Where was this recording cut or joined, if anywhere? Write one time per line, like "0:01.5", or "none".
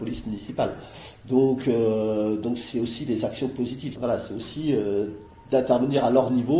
0:04.0